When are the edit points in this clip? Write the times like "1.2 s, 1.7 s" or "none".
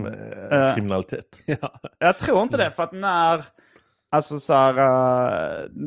none

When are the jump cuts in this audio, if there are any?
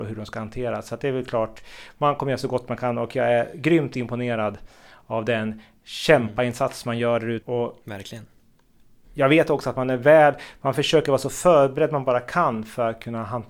7.4 s

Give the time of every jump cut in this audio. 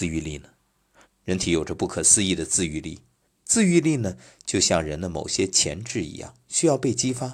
1.0 s, 3.2 s

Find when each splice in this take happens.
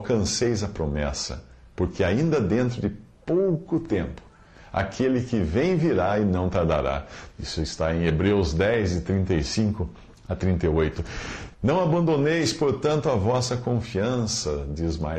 7.3 s, 11.5 s

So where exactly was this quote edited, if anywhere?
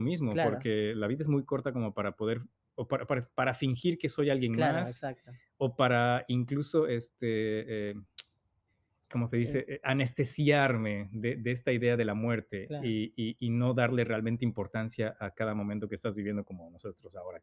none

